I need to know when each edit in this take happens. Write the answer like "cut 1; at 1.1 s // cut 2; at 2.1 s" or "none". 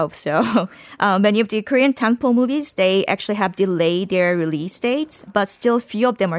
cut 1; at 5.3 s